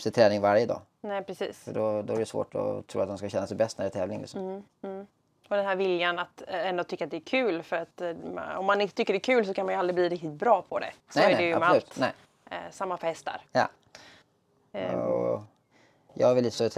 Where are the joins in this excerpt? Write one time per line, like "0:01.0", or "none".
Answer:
none